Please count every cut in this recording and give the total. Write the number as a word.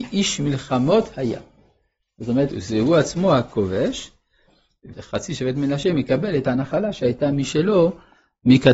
two